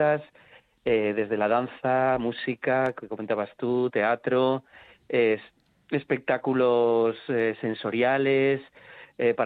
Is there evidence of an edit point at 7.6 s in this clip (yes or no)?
no